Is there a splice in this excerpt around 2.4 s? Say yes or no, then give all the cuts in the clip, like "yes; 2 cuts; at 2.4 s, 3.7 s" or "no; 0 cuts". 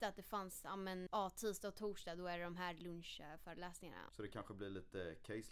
no; 2 cuts; at 1.1 s, 4.1 s